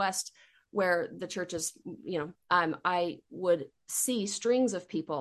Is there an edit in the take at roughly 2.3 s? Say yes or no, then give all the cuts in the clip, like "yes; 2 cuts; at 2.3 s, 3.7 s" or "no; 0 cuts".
yes; 1 cut; at 2.3 s